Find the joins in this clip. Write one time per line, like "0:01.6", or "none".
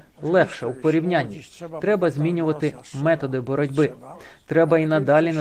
none